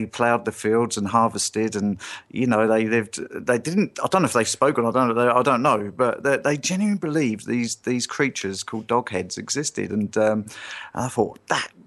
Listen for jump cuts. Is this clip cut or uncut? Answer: uncut